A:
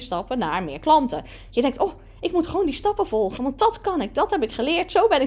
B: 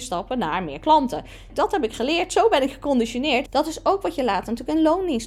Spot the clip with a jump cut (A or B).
B